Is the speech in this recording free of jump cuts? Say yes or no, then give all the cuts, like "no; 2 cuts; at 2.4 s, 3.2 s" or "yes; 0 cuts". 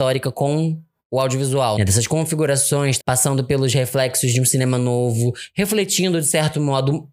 no; 2 cuts; at 1.8 s, 3.0 s